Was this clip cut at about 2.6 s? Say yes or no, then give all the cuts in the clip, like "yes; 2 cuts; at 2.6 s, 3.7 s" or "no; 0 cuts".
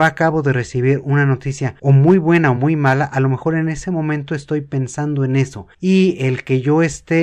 no; 0 cuts